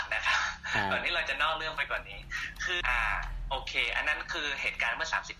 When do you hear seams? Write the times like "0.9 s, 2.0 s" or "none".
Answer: 2.8 s